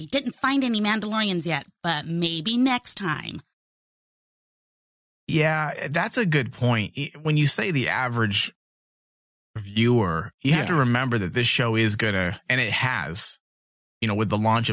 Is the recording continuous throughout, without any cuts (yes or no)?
yes